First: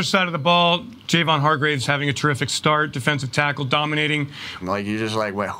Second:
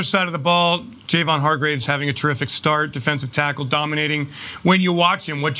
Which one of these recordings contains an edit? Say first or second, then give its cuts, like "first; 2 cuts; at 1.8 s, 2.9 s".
first; 1 cut; at 4.6 s